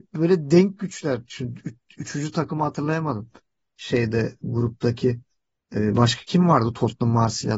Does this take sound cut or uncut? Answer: uncut